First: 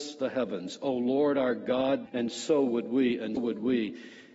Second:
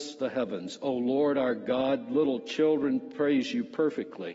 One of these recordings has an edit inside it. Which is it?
first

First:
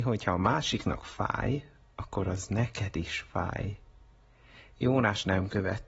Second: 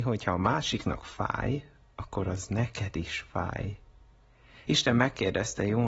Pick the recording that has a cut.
second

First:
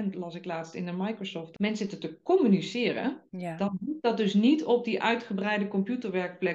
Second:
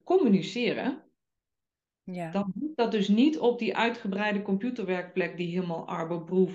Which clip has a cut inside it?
first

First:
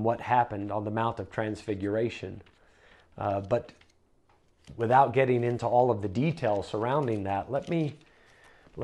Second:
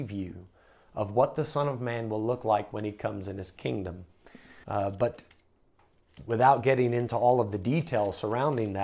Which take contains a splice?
second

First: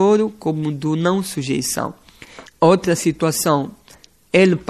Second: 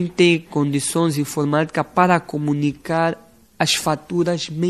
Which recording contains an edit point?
first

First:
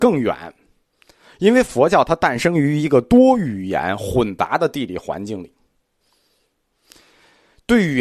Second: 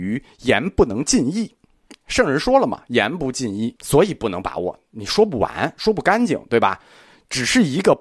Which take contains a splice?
second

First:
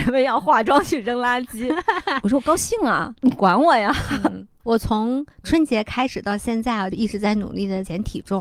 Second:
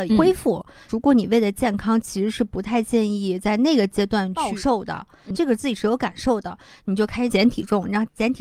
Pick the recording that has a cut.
second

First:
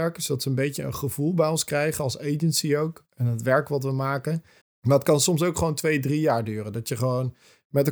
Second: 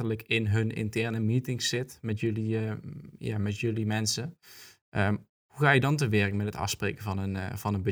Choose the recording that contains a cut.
first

